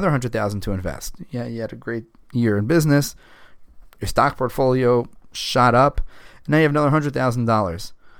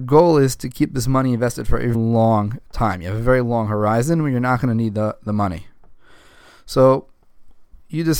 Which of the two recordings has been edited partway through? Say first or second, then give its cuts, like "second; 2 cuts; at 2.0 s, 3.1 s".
second; 1 cut; at 1.9 s